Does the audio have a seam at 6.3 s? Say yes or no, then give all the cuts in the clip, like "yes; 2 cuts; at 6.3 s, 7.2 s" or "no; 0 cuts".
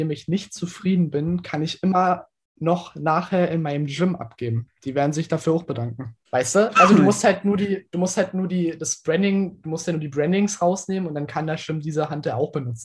yes; 1 cut; at 6.3 s